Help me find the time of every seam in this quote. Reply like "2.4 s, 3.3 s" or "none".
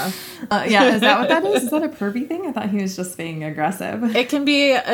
none

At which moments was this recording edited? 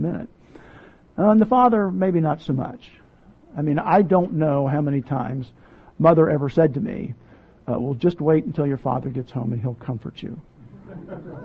none

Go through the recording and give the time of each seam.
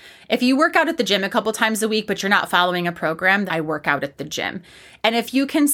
3.5 s

